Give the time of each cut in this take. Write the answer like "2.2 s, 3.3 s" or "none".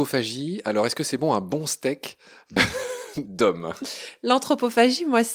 none